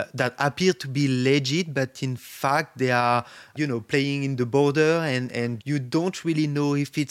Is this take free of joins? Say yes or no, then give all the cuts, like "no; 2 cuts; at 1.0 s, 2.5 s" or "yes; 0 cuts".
no; 2 cuts; at 3.6 s, 5.6 s